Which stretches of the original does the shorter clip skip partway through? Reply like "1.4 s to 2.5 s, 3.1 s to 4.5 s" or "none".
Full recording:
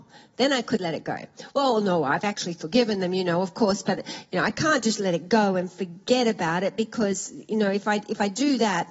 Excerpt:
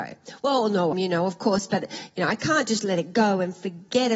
2.0 s to 3.1 s